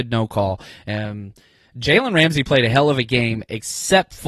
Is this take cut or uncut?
uncut